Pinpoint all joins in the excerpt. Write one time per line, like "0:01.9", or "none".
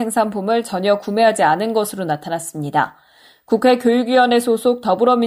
none